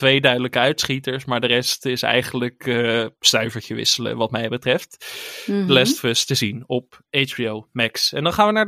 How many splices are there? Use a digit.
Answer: 0